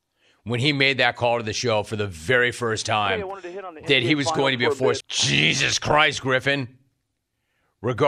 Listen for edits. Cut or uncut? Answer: cut